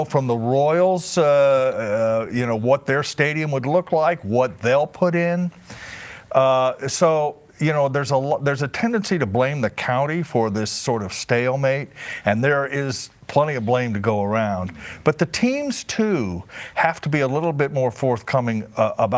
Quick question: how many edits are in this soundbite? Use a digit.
0